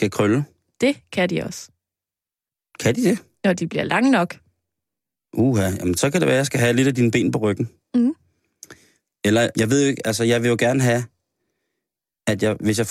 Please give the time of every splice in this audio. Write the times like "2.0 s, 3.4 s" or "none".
9.5 s